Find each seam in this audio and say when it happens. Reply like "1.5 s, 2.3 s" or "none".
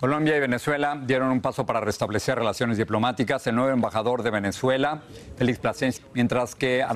6.0 s

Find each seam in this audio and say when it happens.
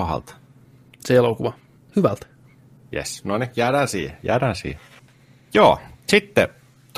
1.9 s

